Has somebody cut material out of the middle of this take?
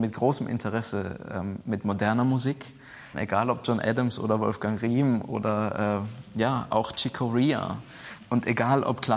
no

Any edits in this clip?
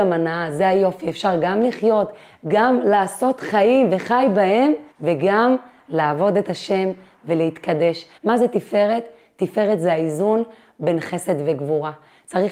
yes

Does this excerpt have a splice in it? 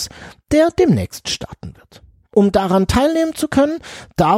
no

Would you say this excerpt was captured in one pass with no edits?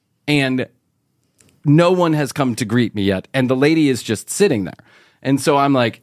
yes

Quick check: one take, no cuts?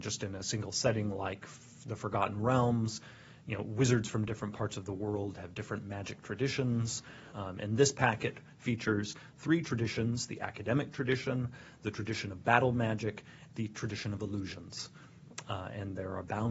no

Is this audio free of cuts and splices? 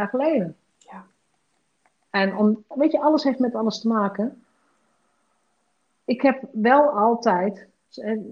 no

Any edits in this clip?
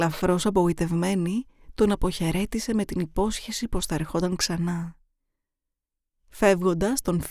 no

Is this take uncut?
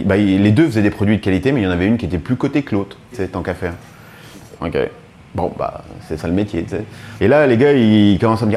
no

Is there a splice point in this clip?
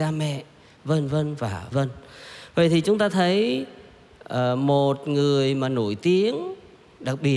yes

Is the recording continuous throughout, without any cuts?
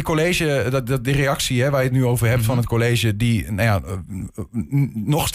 yes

